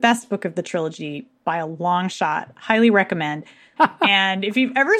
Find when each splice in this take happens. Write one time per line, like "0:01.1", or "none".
0:03.8